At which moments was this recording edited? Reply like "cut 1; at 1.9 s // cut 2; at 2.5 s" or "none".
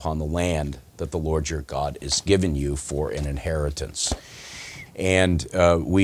cut 1; at 4.9 s